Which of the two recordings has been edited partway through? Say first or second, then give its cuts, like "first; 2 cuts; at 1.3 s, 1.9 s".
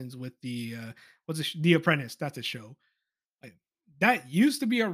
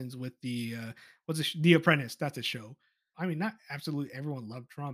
second; 1 cut; at 3.1 s